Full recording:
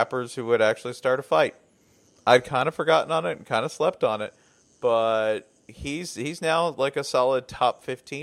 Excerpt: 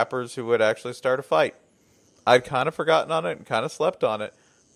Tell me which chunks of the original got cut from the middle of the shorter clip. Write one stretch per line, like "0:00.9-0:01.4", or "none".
none